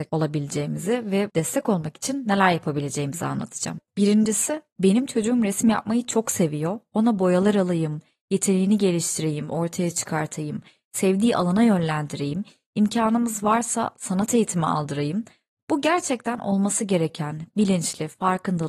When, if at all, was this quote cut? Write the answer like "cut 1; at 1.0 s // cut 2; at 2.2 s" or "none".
cut 1; at 3.9 s